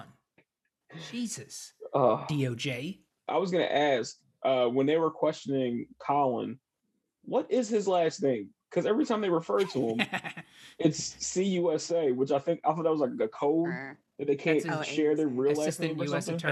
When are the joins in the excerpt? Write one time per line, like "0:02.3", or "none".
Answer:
none